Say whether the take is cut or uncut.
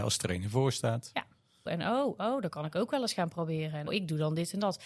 cut